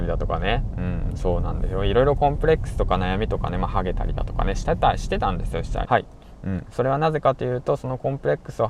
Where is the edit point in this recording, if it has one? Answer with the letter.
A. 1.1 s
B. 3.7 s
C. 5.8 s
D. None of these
C